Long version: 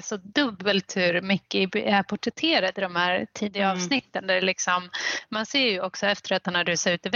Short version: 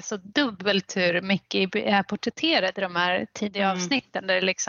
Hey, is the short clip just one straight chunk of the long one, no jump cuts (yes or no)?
yes